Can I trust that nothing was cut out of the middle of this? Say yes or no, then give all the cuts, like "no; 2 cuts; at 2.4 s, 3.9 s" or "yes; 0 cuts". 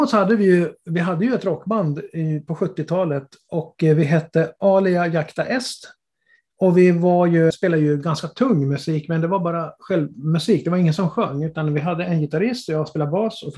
no; 1 cut; at 7.5 s